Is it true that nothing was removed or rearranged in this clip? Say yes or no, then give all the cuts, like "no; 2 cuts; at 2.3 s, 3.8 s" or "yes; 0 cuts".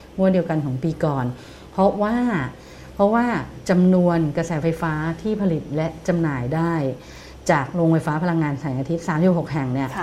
yes; 0 cuts